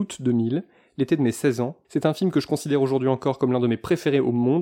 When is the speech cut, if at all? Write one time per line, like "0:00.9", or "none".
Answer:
0:01.8